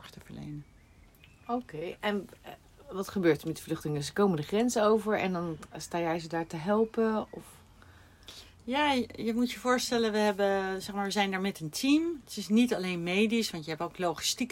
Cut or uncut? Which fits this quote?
uncut